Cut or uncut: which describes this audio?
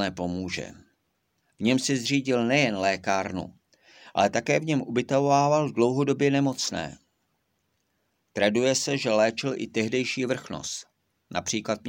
cut